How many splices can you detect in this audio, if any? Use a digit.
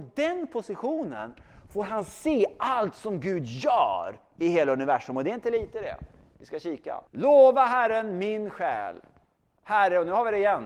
1